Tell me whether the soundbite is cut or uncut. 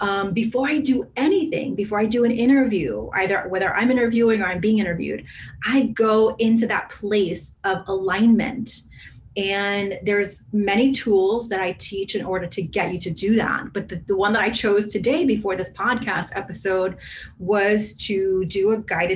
uncut